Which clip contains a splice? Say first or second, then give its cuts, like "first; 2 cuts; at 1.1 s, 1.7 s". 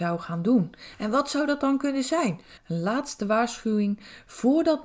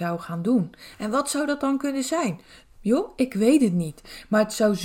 first; 1 cut; at 2.6 s